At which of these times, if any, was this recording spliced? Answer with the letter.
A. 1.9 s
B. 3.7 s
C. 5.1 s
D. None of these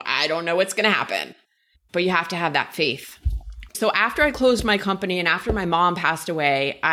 B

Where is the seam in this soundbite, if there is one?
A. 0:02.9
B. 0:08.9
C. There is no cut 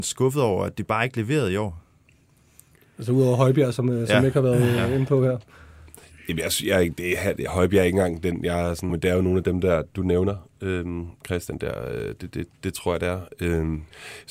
B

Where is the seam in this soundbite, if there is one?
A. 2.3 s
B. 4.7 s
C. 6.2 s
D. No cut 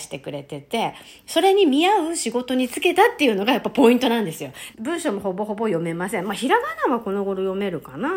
B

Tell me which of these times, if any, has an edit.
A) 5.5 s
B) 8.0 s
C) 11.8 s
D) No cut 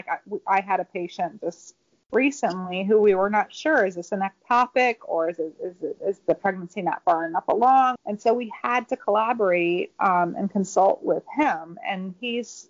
B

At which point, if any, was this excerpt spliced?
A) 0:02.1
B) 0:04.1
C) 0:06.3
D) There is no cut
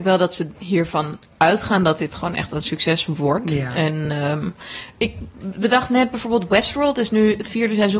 D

